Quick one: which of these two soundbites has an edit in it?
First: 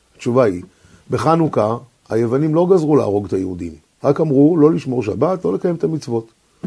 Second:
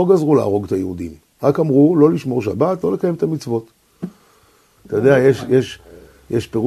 second; 1 cut; at 4.8 s

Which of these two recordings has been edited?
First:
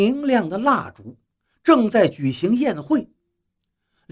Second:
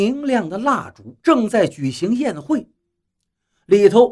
second; 1 cut; at 1.2 s

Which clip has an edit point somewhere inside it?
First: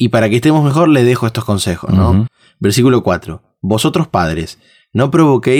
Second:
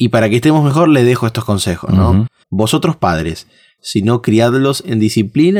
second; 2 cuts; at 2.4 s, 3.8 s

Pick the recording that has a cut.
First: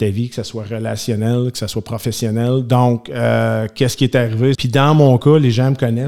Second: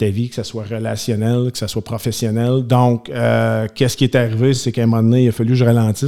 first; 1 cut; at 4.5 s

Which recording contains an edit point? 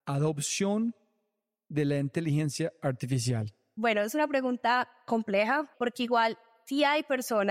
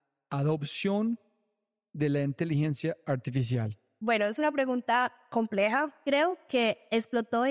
first; 1 cut; at 5.7 s

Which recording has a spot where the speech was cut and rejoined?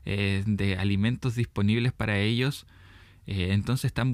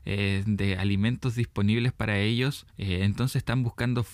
second; 1 cut; at 2.7 s

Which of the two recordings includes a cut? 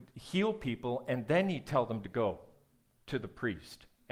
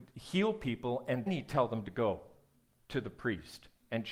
second; 1 cut; at 1.3 s

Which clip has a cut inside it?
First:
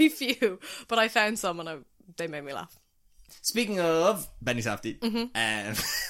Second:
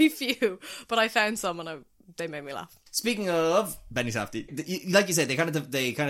second; 2 cuts; at 2.9 s, 4.5 s

